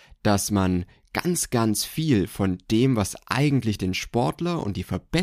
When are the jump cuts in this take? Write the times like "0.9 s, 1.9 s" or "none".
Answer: none